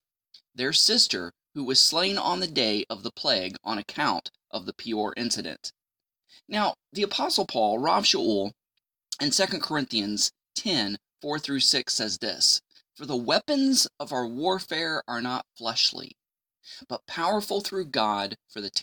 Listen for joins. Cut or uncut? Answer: uncut